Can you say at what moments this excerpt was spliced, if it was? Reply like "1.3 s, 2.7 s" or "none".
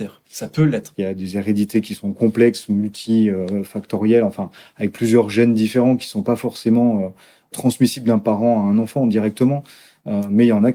0.9 s